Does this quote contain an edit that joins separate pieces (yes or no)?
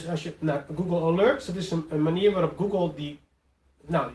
no